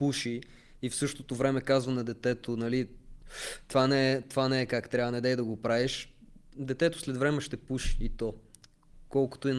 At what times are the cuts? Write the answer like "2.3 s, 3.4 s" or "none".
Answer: none